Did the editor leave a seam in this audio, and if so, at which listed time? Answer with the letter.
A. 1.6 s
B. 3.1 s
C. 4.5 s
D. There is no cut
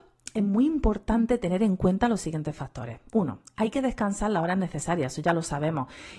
D